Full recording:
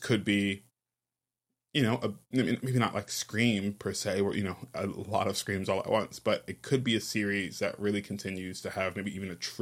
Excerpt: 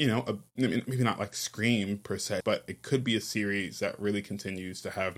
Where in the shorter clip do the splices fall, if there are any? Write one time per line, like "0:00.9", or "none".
0:02.4